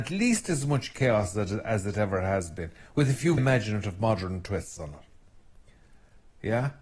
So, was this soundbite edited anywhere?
yes; 1 cut; at 3.4 s

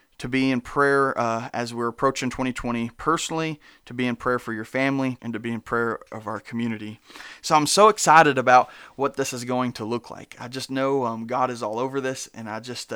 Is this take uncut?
no; 1 cut; at 5.2 s

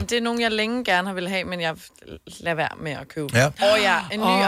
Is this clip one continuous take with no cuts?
no; 1 cut; at 3.6 s

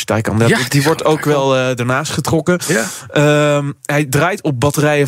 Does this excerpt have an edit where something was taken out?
no; 0 cuts

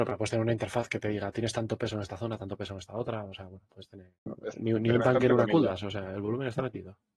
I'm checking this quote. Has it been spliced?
yes; 1 cut; at 4.3 s

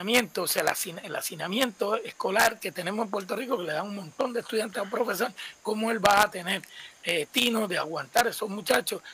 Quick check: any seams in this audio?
no; 0 cuts

